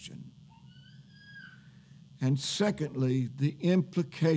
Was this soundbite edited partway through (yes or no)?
no